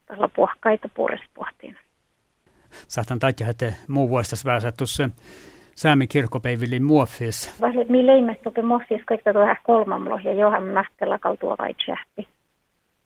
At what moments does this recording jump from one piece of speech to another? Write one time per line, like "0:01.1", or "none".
0:02.7
0:07.6

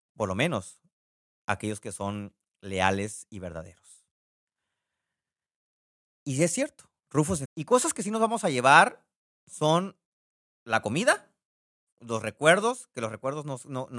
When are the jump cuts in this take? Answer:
0:07.4

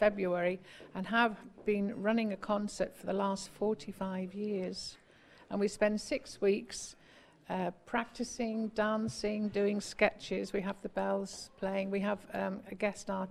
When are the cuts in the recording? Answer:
none

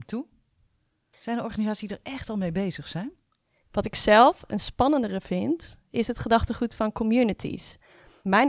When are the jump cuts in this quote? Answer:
0:03.6
0:05.9

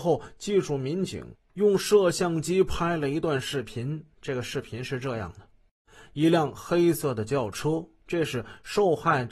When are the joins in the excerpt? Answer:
none

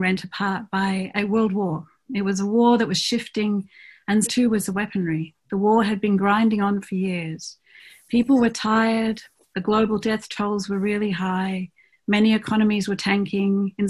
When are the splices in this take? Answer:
0:04.3

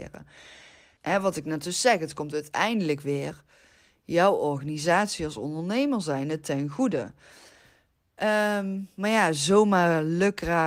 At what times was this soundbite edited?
0:01.0

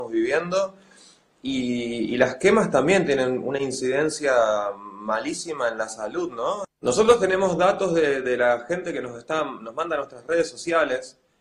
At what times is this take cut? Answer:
0:06.6

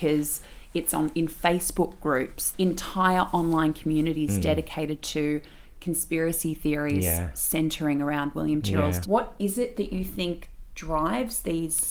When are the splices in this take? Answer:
0:02.5
0:09.0

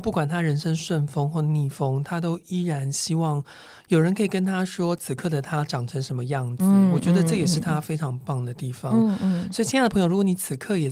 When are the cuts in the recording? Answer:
none

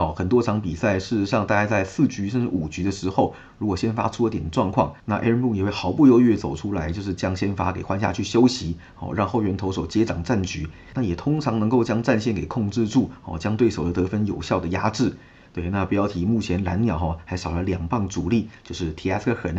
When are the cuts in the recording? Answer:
none

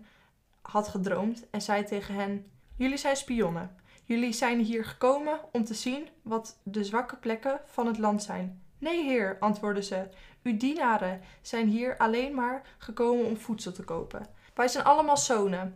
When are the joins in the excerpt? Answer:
0:06.6

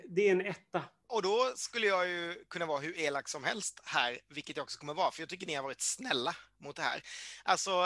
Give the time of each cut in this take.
none

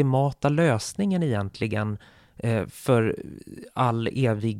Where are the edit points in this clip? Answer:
none

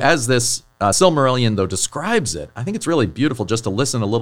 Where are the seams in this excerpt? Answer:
none

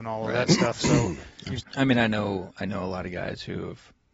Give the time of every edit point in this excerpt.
0:01.6

